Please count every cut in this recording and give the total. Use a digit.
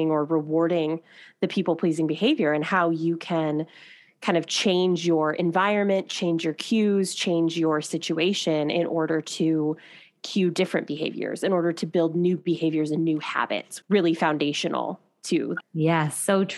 2